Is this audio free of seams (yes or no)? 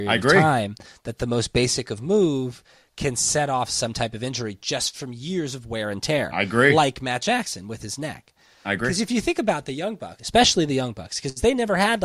no